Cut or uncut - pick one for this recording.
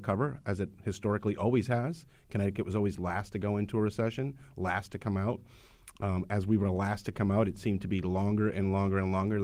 uncut